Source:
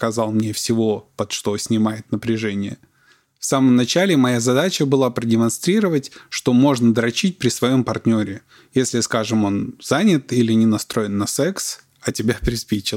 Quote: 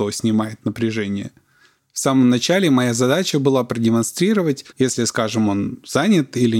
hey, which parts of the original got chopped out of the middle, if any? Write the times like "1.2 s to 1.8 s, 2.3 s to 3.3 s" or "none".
6.2 s to 8.6 s